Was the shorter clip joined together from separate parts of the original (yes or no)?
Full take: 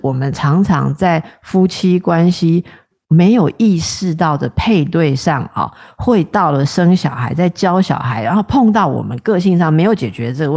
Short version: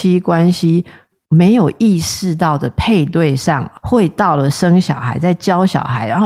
yes